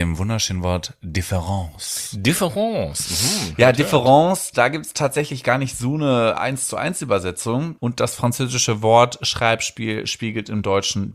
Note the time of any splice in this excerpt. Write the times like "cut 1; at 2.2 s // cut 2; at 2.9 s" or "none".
cut 1; at 7.8 s

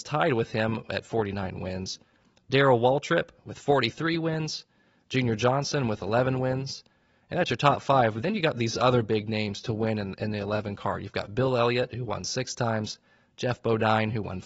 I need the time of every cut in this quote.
none

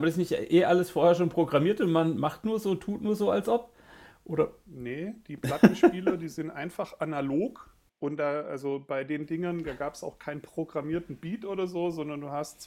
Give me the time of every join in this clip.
none

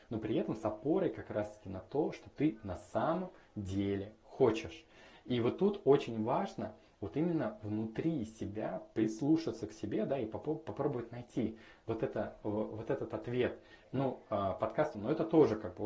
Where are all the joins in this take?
cut 1; at 13.8 s // cut 2; at 14.9 s

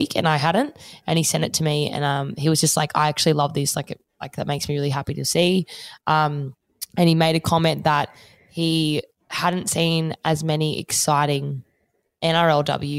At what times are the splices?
none

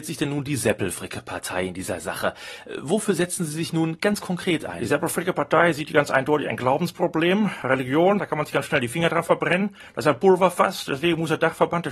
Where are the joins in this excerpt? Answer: cut 1; at 8.2 s

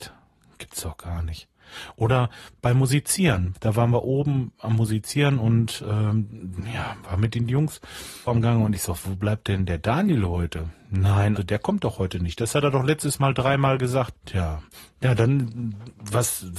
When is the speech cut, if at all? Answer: cut 1; at 8.3 s // cut 2; at 11.4 s // cut 3; at 14.1 s

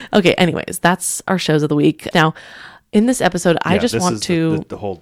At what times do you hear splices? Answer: cut 1; at 2.1 s

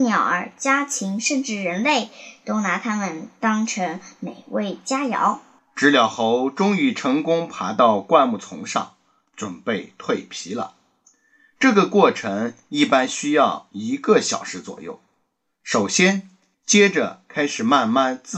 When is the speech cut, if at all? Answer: cut 1; at 5.6 s // cut 2; at 16.5 s

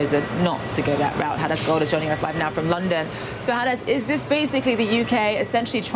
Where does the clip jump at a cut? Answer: none

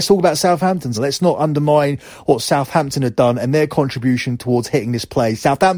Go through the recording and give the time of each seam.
cut 1; at 0.9 s

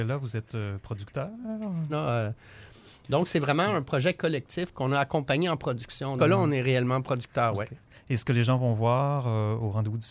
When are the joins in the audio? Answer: cut 1; at 1.9 s // cut 2; at 6.2 s

